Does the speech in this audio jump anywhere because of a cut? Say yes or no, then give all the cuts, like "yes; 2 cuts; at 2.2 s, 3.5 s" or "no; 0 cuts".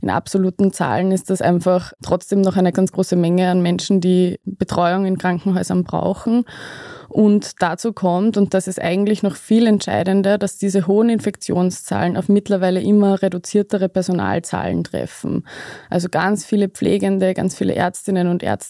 yes; 1 cut; at 2.7 s